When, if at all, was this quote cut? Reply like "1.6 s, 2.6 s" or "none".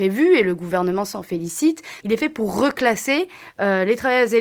2.0 s